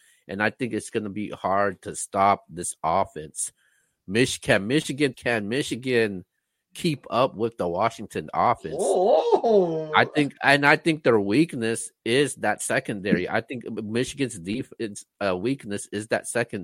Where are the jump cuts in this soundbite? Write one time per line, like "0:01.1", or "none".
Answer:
0:05.1

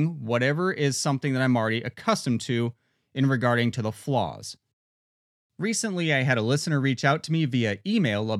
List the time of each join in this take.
none

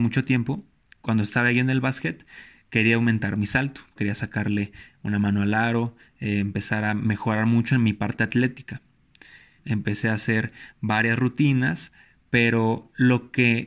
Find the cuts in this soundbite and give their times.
0:04.0
0:09.6

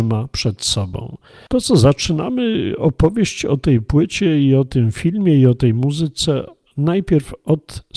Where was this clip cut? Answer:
0:01.5

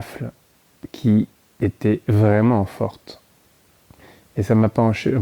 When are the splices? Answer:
none

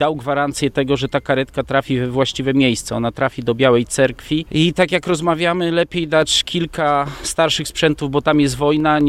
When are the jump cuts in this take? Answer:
none

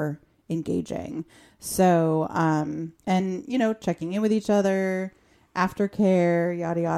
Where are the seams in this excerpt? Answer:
0:03.0

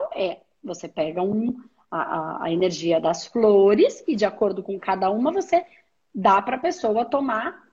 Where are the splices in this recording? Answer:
none

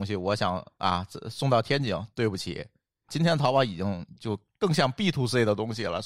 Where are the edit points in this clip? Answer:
0:03.1

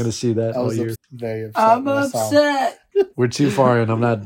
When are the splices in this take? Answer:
0:00.9
0:02.9

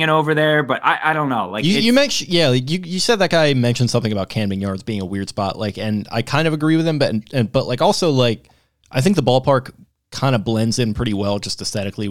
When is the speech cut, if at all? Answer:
none

